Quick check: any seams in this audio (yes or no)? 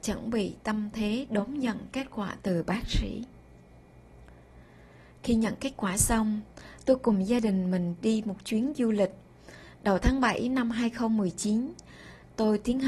no